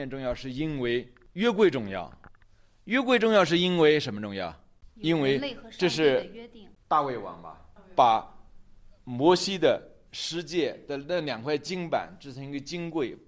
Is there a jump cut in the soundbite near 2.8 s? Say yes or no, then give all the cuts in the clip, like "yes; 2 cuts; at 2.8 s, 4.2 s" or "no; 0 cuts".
no; 2 cuts; at 4.9 s, 10.1 s